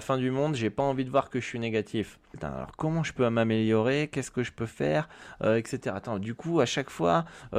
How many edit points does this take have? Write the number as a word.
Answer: one